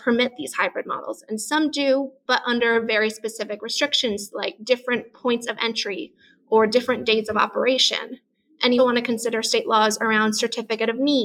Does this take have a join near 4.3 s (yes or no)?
no